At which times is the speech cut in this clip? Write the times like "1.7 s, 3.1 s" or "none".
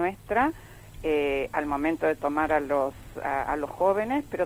none